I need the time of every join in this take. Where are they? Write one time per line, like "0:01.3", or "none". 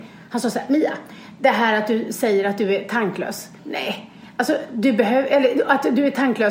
0:03.6